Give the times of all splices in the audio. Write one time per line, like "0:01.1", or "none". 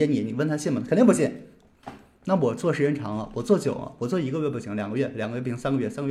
none